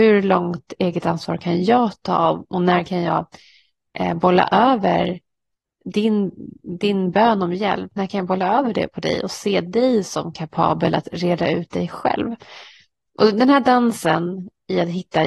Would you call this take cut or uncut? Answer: uncut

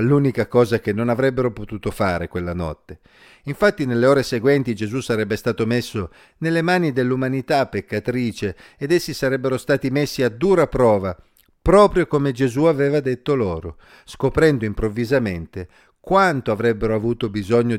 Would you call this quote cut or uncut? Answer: uncut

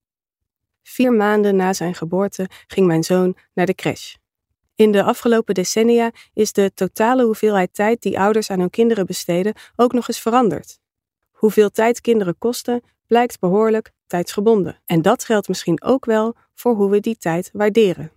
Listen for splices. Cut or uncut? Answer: cut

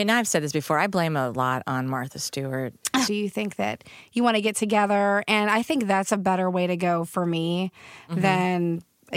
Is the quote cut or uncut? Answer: cut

